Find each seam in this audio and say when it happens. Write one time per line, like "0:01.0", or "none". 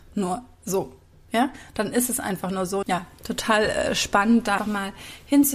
0:02.8
0:04.6